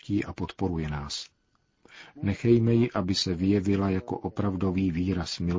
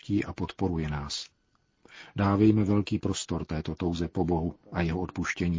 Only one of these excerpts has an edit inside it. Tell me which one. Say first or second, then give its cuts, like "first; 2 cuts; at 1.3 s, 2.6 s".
first; 1 cut; at 2.2 s